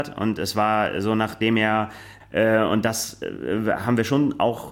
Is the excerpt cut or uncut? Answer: cut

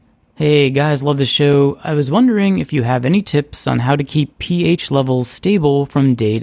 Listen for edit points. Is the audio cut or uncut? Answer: uncut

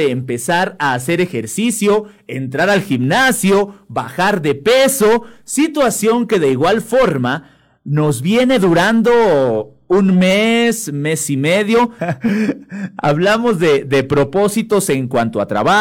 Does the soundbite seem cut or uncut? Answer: cut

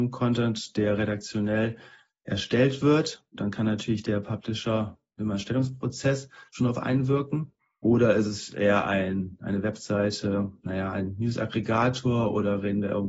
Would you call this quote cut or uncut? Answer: uncut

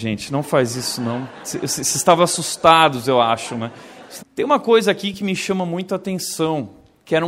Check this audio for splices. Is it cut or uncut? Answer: cut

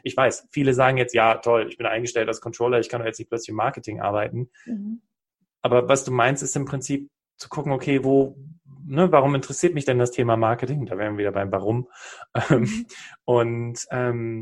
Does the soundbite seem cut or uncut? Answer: uncut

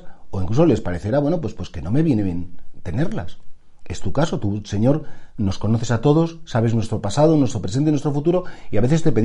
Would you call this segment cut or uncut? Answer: uncut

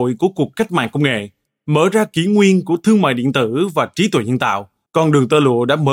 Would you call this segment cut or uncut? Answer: cut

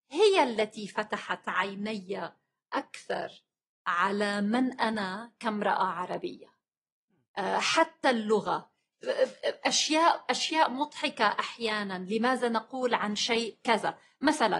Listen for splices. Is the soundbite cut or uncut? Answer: uncut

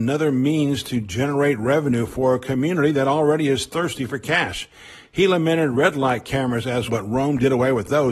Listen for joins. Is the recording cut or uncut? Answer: cut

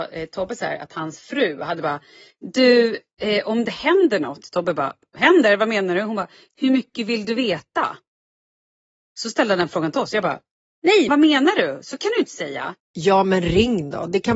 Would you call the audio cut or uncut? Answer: cut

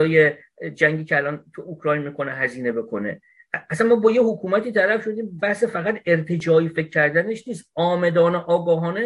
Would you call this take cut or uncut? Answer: cut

